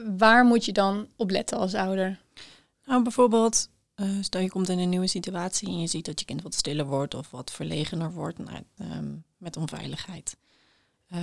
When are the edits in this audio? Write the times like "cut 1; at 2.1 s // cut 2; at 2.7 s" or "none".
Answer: cut 1; at 8.8 s